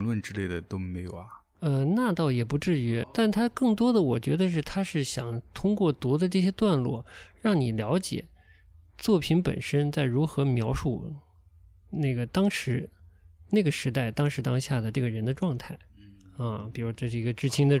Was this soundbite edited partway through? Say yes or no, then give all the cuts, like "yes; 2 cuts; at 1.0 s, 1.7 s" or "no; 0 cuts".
yes; 1 cut; at 3.0 s